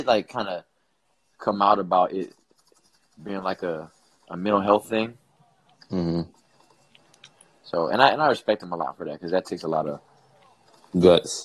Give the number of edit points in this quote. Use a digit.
0